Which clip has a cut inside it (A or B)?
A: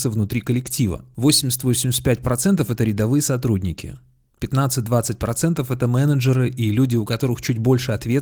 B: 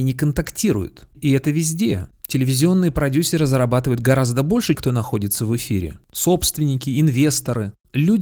B